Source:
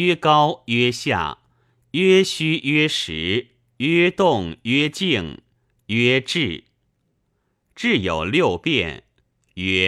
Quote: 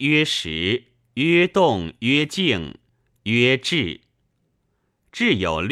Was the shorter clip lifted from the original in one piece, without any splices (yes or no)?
yes